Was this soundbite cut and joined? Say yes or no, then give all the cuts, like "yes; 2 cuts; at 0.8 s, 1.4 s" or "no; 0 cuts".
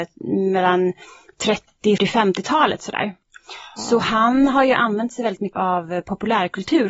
yes; 2 cuts; at 2.0 s, 5.5 s